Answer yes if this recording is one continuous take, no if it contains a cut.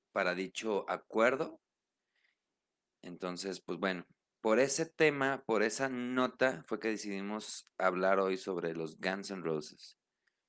yes